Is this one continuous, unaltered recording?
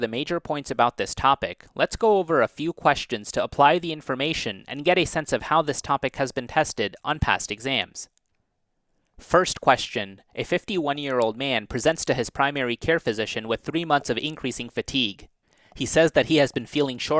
yes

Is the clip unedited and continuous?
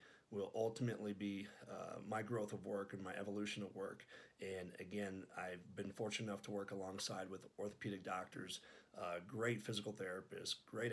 yes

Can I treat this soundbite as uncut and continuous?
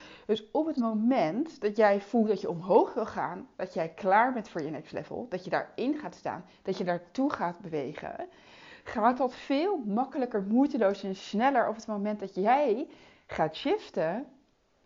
yes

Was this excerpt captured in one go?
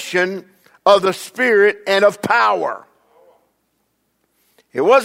yes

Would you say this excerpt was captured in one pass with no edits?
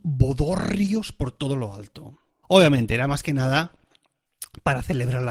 no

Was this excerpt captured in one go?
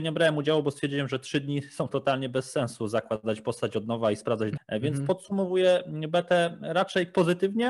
no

